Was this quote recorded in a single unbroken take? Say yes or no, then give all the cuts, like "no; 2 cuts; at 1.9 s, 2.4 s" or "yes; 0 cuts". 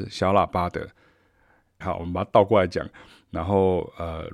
no; 1 cut; at 1.8 s